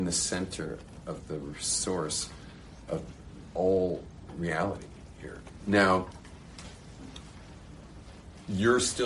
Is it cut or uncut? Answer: cut